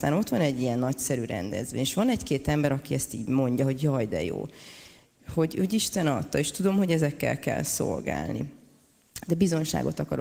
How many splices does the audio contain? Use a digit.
1